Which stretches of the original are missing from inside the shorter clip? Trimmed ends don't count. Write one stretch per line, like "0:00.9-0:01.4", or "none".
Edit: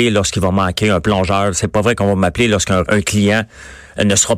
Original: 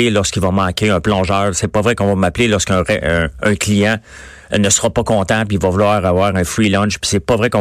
0:02.9-0:03.4